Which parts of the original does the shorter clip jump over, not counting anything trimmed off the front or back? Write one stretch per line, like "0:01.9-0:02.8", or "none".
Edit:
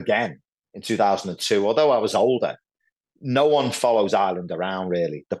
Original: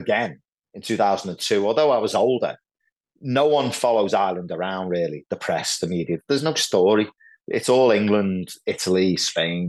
none